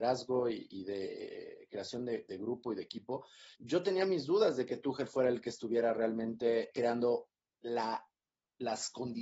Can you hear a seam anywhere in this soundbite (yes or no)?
yes